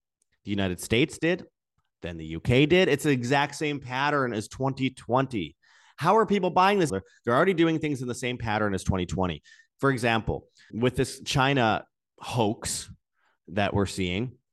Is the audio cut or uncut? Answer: cut